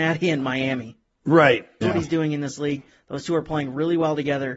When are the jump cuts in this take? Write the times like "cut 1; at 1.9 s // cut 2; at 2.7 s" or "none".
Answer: cut 1; at 1.8 s